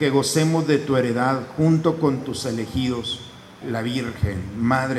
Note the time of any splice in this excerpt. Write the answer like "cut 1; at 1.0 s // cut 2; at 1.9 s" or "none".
cut 1; at 3.6 s

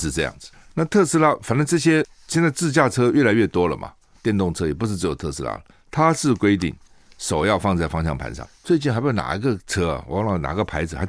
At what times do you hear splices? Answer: none

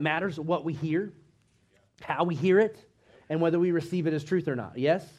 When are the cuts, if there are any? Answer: none

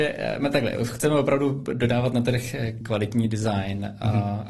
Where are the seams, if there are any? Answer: cut 1; at 2.8 s

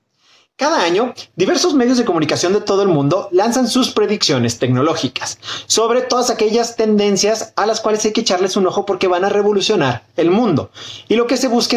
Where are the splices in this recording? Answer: none

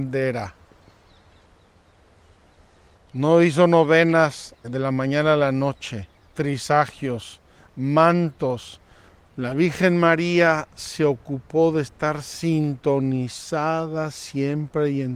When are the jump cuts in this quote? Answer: cut 1; at 4.6 s // cut 2; at 9.3 s

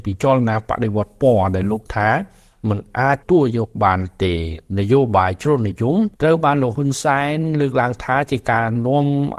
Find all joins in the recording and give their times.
cut 1; at 3.2 s // cut 2; at 6.1 s

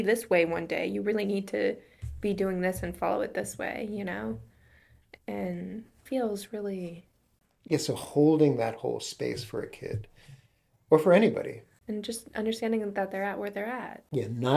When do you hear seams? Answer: cut 1; at 6.1 s

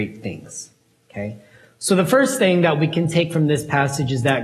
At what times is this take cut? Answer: none

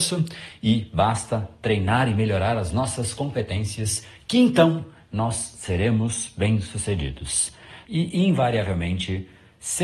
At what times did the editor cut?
cut 1; at 7.8 s

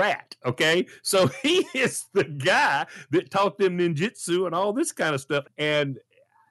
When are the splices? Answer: cut 1; at 5.4 s

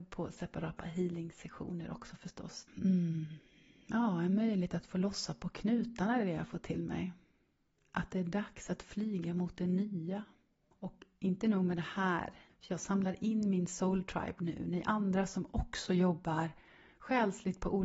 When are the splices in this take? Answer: cut 1; at 2.7 s // cut 2; at 10.7 s // cut 3; at 12.5 s

